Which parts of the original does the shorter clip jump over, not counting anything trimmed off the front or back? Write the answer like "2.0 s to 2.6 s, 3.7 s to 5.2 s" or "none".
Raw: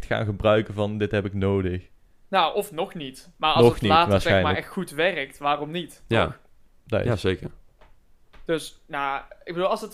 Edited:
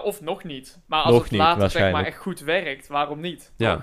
none